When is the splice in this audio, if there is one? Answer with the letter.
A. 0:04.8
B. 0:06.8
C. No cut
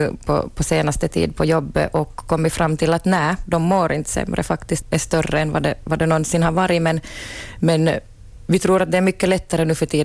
A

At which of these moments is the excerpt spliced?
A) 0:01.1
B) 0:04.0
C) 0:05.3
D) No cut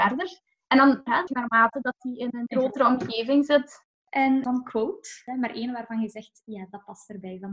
A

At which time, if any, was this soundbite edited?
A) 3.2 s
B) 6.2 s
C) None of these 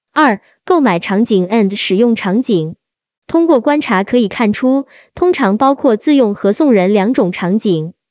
A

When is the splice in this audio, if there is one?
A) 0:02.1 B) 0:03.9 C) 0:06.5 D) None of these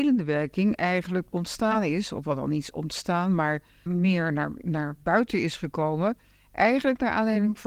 B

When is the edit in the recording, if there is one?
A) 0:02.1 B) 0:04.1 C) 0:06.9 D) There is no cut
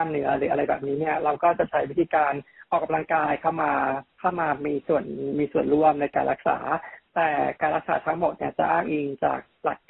B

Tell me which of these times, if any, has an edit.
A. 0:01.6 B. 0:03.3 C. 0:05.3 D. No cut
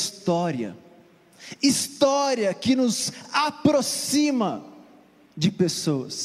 A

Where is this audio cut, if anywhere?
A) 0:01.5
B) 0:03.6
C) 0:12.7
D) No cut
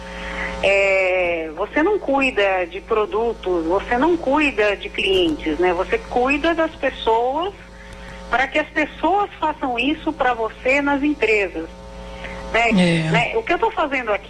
C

